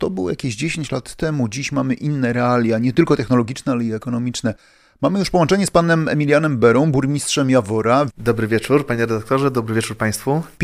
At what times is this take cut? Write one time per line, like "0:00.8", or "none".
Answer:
0:08.1